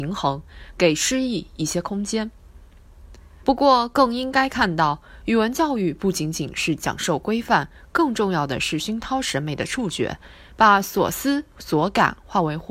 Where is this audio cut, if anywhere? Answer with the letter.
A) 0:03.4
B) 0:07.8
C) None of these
A